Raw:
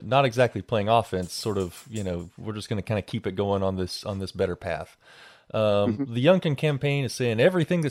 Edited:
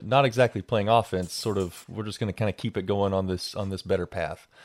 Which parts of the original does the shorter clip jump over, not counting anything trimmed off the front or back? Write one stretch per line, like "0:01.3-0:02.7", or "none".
0:01.8-0:02.3